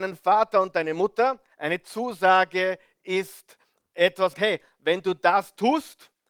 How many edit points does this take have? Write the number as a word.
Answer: two